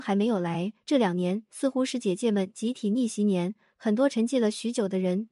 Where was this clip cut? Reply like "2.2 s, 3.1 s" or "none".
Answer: none